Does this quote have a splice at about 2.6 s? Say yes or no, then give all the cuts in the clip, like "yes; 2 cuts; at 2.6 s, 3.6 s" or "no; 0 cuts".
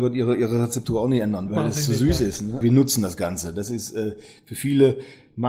yes; 2 cuts; at 1.5 s, 2.6 s